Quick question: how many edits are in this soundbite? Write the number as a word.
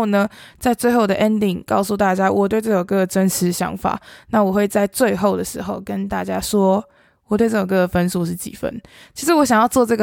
zero